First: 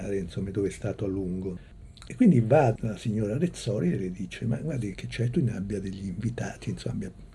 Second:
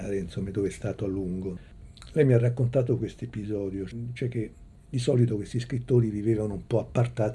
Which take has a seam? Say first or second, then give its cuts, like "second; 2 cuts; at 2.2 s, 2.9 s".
first; 2 cuts; at 2.1 s, 4.9 s